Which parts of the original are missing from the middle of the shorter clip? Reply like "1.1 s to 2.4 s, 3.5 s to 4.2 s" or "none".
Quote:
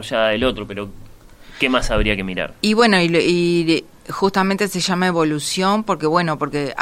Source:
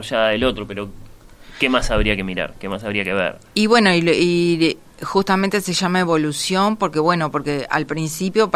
2.5 s to 3.5 s